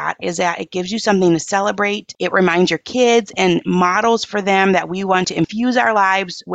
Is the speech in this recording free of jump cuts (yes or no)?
yes